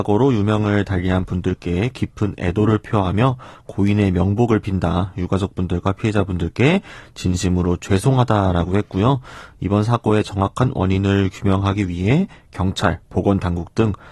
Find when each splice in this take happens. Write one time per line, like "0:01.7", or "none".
none